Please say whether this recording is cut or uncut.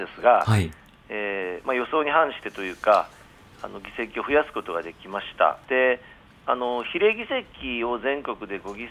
cut